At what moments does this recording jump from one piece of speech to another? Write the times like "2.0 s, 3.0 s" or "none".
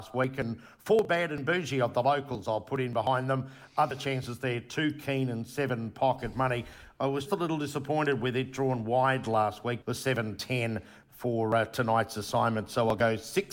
7.3 s, 9.8 s